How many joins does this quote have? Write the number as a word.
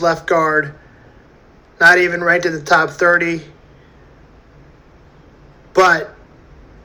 zero